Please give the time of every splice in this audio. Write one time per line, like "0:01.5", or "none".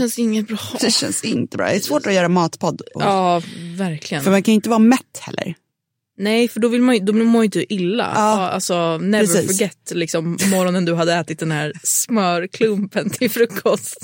none